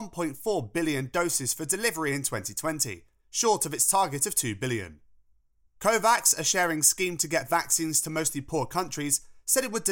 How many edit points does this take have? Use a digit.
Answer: 1